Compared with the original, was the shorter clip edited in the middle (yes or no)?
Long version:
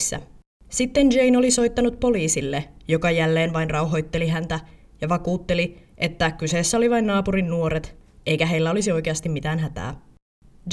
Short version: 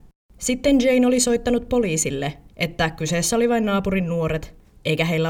yes